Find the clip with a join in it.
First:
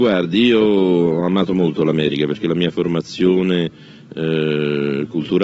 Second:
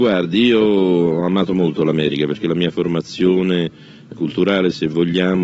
second; 1 cut; at 4.1 s

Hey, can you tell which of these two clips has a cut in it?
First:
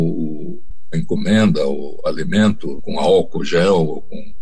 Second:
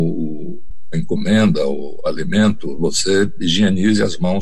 first; 1 cut; at 2.8 s

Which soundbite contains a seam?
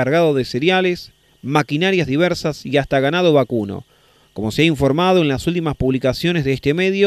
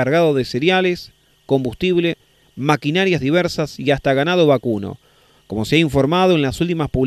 first; 1 cut; at 1.2 s

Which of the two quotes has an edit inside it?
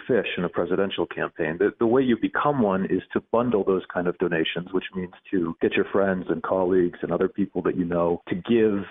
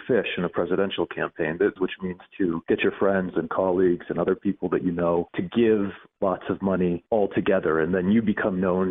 second; 1 cut; at 1.8 s

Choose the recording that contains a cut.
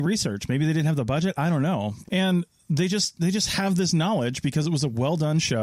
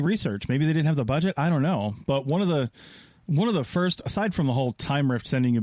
first; 1 cut; at 2.0 s

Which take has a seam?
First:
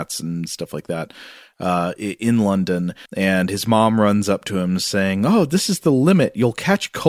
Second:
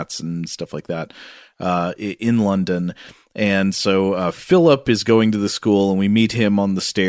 first; 1 cut; at 3.1 s

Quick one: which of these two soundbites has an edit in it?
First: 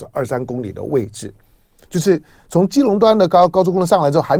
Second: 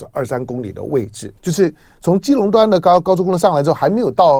second; 1 cut; at 1.4 s

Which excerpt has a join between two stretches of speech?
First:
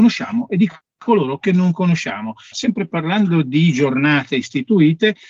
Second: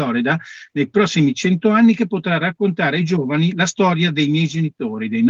first; 1 cut; at 2.5 s

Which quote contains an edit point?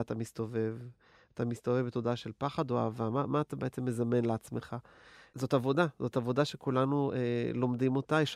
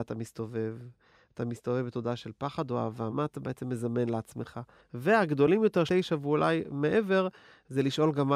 second; 3 cuts; at 3.1 s, 4.8 s, 5.9 s

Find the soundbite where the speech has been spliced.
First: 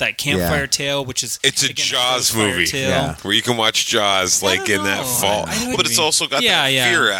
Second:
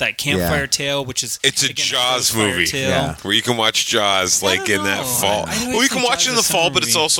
first; 1 cut; at 5.7 s

